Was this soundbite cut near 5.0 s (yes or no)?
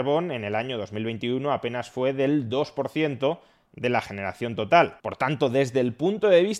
yes